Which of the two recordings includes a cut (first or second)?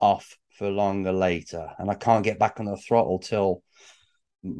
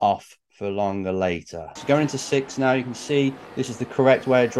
second